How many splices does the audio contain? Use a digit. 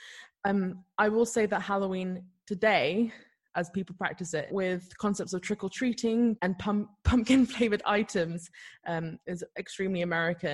2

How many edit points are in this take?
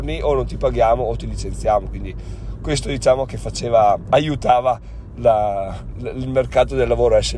0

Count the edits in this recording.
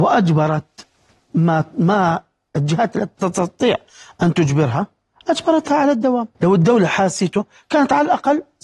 2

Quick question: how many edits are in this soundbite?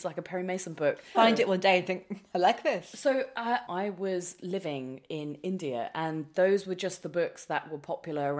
2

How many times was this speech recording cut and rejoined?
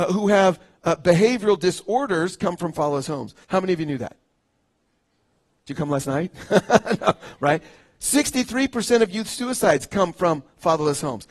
1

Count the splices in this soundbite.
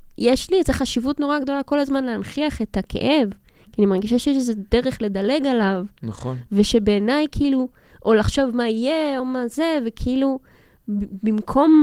1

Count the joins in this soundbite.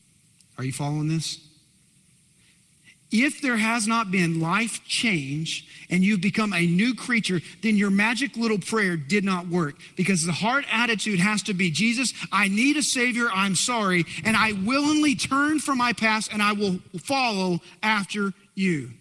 0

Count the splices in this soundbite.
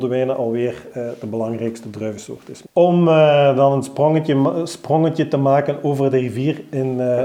1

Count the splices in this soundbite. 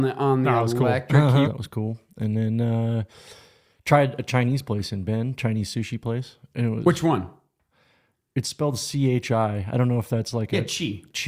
1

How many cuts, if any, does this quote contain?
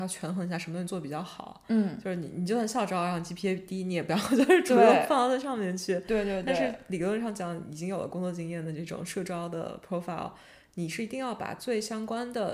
0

